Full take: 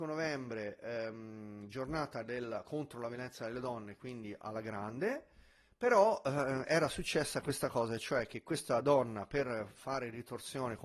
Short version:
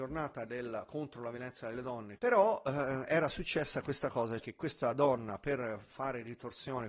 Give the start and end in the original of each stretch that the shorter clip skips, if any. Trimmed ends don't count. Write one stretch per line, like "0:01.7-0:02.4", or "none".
0:04.0-0:05.8
0:08.0-0:08.3